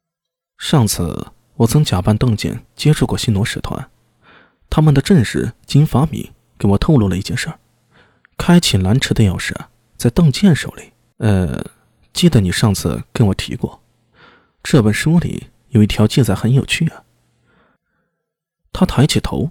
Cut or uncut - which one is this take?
cut